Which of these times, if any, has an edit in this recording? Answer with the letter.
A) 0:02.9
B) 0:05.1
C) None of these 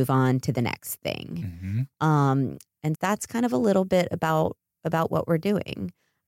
A